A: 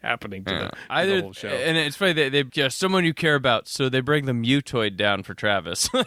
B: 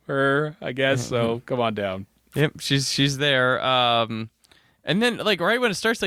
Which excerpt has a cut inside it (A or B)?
A